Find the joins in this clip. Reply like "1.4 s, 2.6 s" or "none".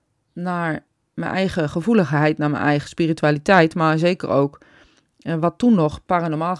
none